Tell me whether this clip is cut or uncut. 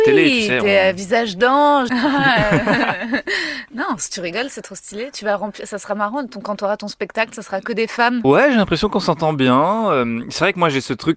cut